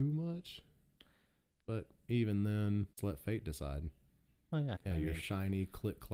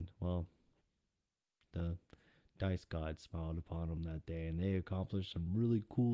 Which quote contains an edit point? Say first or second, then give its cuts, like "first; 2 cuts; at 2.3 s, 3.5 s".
first; 3 cuts; at 1.6 s, 2.9 s, 4.8 s